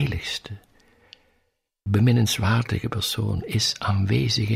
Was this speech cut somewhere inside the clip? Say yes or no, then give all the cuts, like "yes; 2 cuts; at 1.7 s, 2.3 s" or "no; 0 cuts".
yes; 1 cut; at 1.9 s